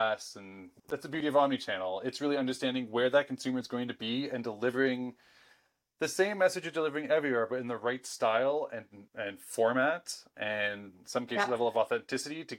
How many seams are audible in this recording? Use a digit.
1